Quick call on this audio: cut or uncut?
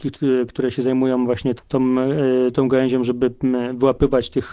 cut